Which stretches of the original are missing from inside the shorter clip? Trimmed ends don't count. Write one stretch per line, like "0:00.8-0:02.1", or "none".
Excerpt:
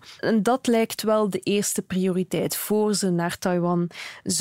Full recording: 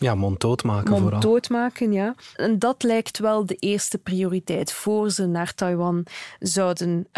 none